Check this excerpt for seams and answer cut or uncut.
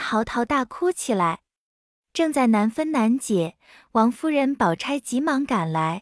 uncut